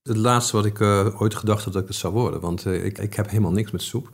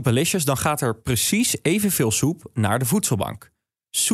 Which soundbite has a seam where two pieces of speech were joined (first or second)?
first